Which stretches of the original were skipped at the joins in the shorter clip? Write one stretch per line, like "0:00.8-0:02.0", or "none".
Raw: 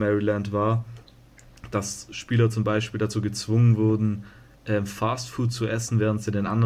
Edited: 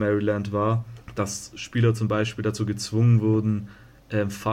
0:01.0-0:01.6